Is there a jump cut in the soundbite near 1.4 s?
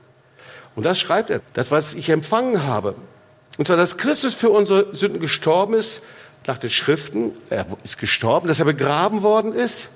yes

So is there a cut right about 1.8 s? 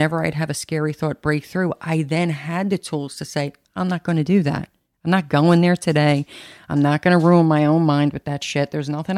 no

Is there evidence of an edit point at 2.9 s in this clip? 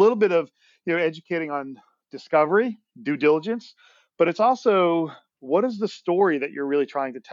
no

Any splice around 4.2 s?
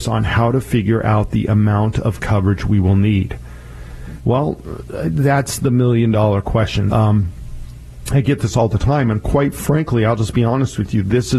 yes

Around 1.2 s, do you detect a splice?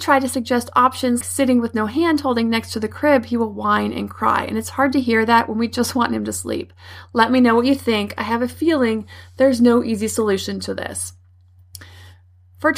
yes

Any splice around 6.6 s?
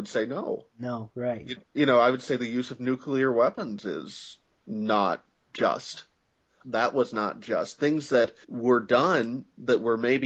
yes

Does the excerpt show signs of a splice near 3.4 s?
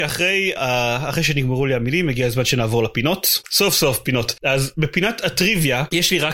yes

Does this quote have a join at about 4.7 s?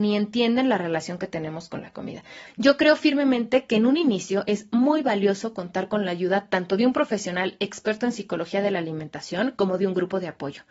no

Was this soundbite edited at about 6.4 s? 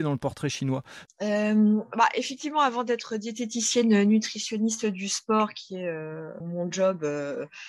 yes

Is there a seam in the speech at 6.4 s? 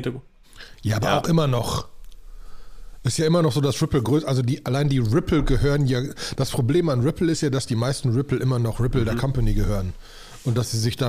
no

